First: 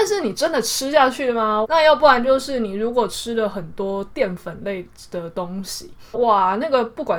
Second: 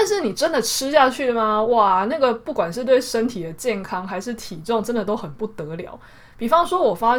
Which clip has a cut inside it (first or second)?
first